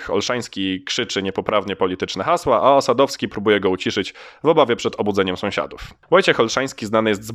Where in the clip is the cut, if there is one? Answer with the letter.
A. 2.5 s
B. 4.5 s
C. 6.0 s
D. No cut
D